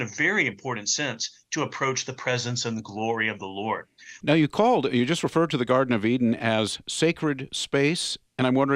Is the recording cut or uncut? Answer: cut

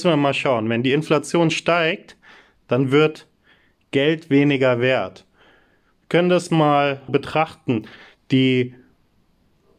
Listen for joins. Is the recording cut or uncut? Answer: cut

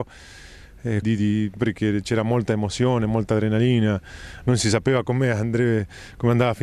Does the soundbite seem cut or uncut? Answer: cut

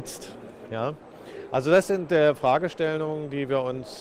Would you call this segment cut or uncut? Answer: uncut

